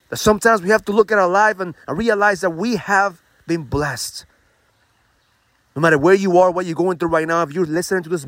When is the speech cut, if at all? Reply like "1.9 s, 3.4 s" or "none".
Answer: none